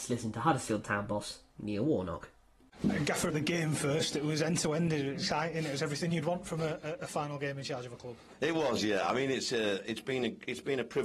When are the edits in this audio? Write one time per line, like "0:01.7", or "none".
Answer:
0:03.3